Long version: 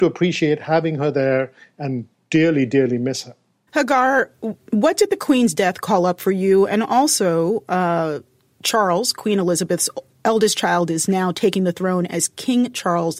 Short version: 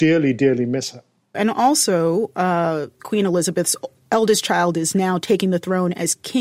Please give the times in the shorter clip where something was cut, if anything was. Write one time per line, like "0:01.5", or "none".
0:01.3
0:03.0